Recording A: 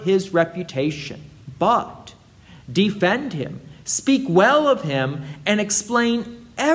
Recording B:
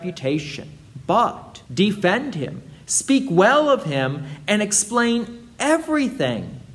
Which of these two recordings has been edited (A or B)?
B